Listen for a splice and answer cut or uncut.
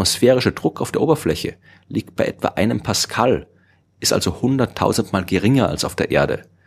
uncut